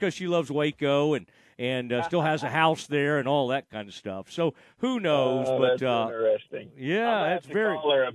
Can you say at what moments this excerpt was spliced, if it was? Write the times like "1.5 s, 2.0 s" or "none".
none